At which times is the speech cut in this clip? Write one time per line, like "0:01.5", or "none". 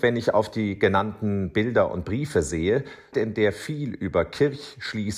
0:03.1